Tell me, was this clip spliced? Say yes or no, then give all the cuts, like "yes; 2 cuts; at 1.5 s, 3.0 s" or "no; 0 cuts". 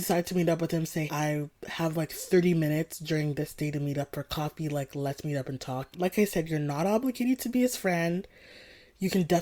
yes; 2 cuts; at 1.1 s, 5.9 s